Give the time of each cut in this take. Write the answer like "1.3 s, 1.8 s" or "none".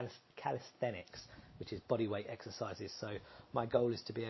none